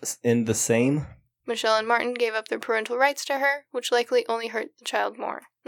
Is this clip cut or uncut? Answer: cut